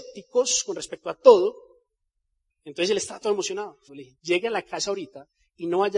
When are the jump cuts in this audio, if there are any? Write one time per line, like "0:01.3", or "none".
0:02.5
0:03.9